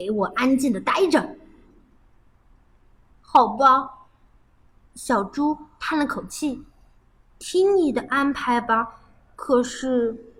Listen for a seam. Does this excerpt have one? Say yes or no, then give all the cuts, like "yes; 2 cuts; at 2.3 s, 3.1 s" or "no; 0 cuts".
no; 0 cuts